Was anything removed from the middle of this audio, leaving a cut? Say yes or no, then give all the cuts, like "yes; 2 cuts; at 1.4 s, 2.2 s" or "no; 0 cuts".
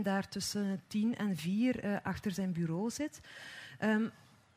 no; 0 cuts